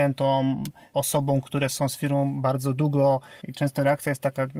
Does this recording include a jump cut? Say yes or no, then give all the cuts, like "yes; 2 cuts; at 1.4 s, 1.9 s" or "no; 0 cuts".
yes; 1 cut; at 3.4 s